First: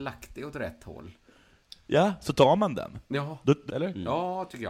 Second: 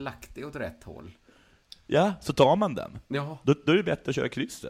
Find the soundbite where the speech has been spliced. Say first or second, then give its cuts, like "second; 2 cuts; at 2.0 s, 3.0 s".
first; 1 cut; at 3.7 s